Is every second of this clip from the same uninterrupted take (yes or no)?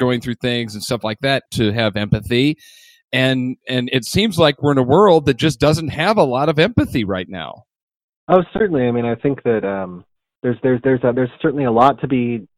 no